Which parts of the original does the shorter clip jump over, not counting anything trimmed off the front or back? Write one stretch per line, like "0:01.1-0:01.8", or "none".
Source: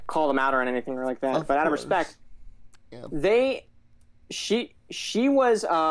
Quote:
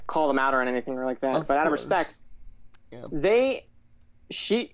none